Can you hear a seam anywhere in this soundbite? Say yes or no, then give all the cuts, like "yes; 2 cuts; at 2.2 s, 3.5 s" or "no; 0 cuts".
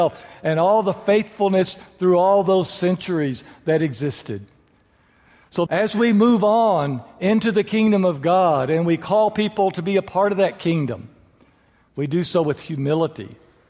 yes; 1 cut; at 5.7 s